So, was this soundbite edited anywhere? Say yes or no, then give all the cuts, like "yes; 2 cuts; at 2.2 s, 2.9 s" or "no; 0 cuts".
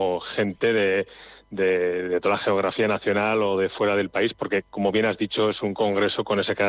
no; 0 cuts